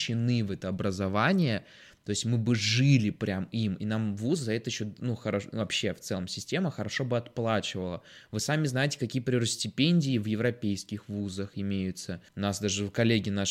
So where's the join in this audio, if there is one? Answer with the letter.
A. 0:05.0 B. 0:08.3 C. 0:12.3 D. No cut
C